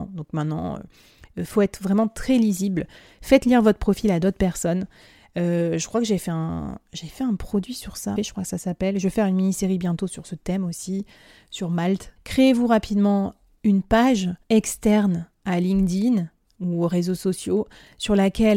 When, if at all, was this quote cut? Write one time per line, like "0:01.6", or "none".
0:08.2
0:12.2
0:14.4